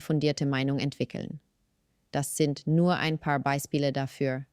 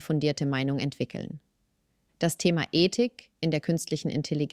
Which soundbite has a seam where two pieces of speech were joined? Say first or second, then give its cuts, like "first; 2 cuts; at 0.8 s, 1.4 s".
second; 1 cut; at 2.1 s